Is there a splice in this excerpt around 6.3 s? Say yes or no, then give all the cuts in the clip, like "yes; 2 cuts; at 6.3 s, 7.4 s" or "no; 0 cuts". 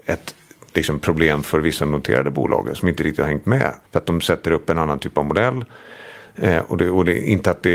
no; 1 cut; at 3.8 s